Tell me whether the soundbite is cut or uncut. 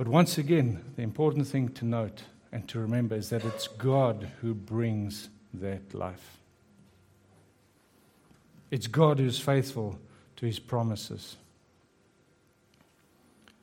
uncut